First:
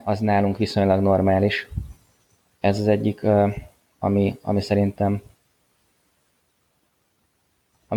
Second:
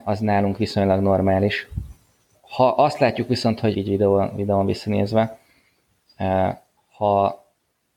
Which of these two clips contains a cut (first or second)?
second